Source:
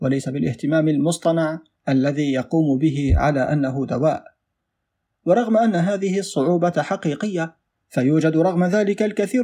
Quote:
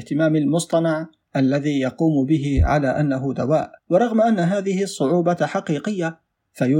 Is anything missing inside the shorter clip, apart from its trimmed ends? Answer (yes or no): yes